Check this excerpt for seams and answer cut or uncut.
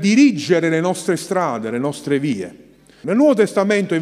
cut